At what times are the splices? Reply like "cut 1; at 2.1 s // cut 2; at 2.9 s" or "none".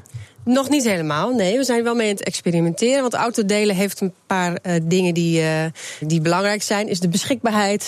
cut 1; at 6.0 s